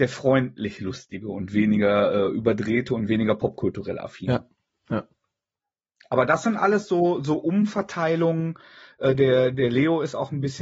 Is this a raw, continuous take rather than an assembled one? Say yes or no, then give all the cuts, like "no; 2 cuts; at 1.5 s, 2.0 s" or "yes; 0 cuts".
yes; 0 cuts